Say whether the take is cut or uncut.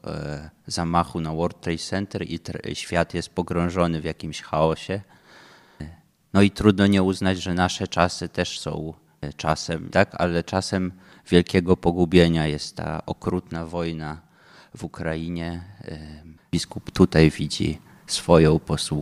cut